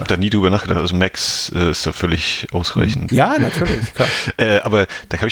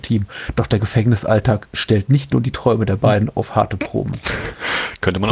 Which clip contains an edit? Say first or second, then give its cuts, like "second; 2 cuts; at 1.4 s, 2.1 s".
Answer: first; 1 cut; at 3.1 s